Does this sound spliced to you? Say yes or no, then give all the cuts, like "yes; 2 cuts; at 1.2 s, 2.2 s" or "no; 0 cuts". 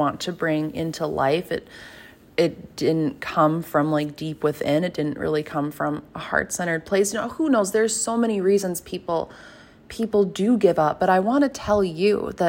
no; 0 cuts